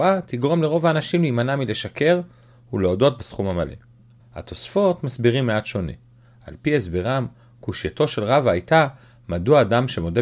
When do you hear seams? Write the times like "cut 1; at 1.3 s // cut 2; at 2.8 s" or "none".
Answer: cut 1; at 4.2 s